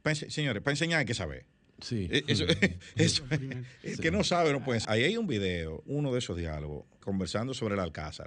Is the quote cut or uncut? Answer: cut